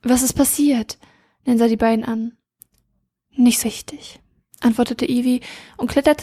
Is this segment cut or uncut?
cut